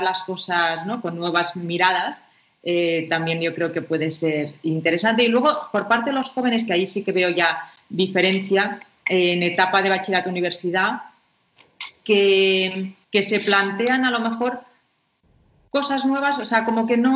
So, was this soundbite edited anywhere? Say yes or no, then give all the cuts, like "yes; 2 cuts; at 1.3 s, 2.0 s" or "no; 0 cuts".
yes; 1 cut; at 13.0 s